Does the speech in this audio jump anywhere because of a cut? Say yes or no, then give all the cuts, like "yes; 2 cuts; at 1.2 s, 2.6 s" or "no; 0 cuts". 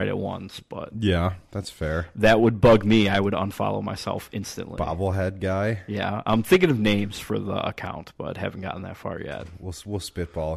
no; 0 cuts